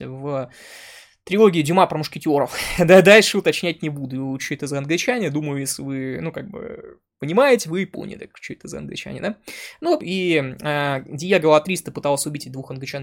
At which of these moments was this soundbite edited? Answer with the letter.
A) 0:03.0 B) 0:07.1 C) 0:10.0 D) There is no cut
C